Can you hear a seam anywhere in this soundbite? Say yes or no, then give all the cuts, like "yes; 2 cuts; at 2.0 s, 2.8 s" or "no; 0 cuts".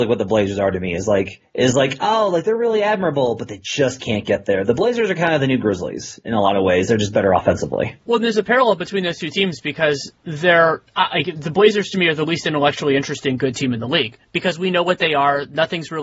yes; 1 cut; at 8.0 s